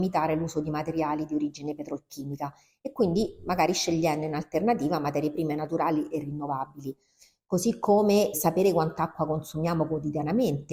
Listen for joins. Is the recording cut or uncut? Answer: cut